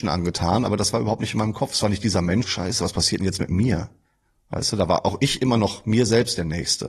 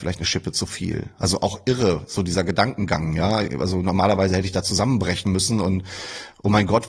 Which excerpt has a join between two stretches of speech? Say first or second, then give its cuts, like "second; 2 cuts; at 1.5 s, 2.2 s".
first; 1 cut; at 2.4 s